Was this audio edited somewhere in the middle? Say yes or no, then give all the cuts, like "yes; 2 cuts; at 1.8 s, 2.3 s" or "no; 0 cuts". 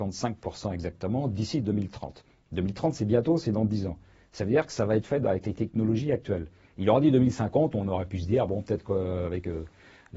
no; 0 cuts